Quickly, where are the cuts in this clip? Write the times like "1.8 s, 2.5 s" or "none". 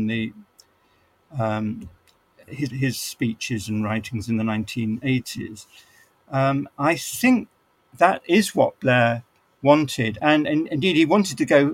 2.7 s, 7.9 s, 10.2 s